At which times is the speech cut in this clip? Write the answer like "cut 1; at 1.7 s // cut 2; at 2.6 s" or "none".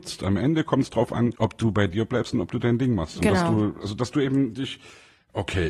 none